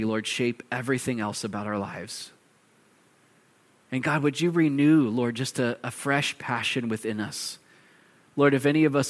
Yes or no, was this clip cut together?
no